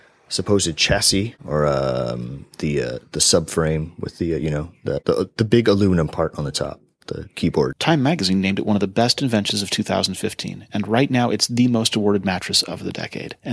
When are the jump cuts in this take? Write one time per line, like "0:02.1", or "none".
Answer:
0:07.7